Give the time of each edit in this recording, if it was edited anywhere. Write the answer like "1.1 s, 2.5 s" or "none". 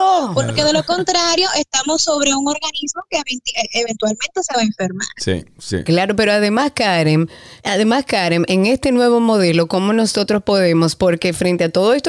7.6 s